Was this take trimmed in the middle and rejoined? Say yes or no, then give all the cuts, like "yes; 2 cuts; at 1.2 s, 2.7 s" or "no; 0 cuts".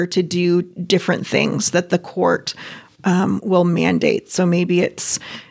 no; 0 cuts